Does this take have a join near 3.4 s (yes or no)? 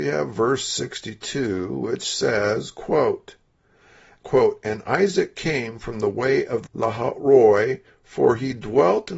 no